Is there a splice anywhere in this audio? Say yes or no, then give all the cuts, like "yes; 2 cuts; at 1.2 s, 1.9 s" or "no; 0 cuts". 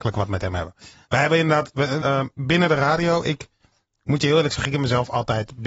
yes; 1 cut; at 2.0 s